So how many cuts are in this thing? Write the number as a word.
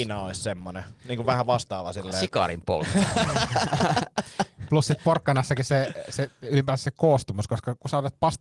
zero